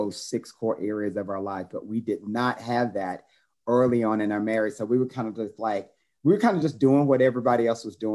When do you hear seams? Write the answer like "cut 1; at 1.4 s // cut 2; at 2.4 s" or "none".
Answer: none